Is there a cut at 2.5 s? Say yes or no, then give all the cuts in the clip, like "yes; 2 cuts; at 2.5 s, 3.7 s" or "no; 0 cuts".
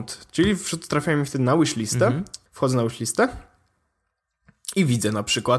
yes; 1 cut; at 2.5 s